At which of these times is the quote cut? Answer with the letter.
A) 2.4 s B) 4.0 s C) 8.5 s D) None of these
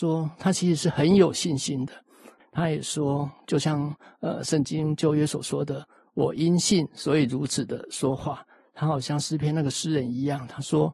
A